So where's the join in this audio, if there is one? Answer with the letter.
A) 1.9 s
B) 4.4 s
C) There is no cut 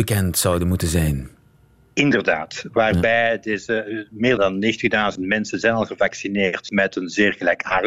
B